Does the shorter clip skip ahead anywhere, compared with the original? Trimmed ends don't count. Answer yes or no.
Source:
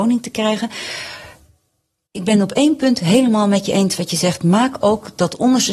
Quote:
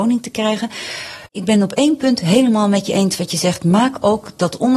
yes